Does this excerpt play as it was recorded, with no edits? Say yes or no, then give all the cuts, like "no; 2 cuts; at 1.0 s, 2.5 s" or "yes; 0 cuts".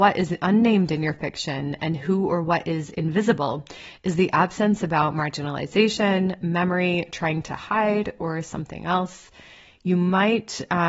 yes; 0 cuts